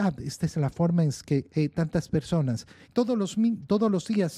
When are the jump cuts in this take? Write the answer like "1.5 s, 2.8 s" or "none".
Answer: 1.5 s, 2.8 s